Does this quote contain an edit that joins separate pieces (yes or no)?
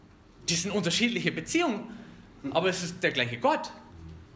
no